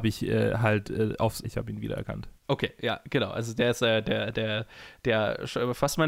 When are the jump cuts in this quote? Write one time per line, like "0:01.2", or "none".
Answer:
0:01.4

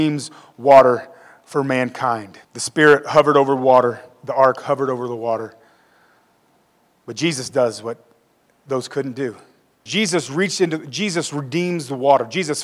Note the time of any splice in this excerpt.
0:02.4
0:09.9

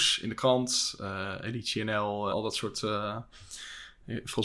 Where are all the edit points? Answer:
0:02.3

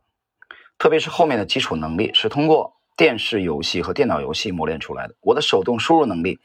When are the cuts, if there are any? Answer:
none

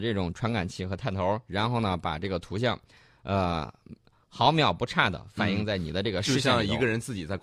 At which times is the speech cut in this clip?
none

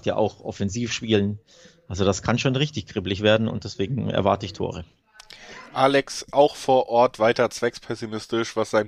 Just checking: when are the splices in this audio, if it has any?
none

